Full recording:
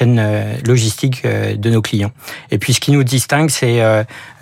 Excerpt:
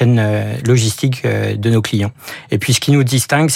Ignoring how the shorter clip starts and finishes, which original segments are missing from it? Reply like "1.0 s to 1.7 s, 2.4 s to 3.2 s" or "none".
none